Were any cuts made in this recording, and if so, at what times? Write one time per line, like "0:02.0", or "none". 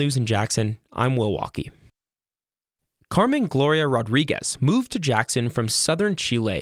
none